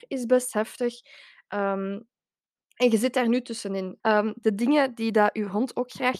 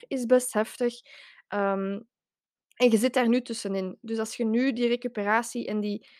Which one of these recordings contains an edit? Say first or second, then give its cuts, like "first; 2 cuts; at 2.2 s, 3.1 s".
first; 1 cut; at 4.0 s